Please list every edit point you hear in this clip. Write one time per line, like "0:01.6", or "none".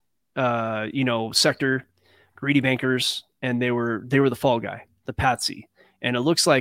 none